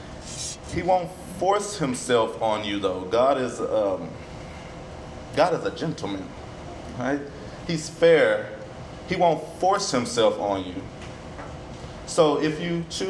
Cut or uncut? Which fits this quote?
uncut